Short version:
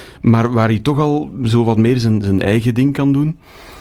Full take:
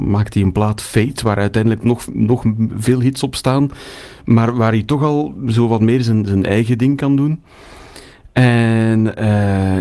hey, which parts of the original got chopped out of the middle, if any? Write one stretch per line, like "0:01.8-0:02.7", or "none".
none